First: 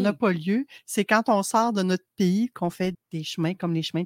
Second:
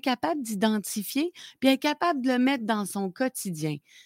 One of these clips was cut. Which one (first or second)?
first